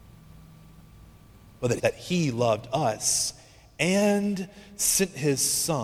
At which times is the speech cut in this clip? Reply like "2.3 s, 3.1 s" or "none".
1.8 s